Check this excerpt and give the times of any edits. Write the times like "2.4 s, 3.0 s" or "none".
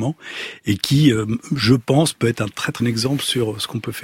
2.8 s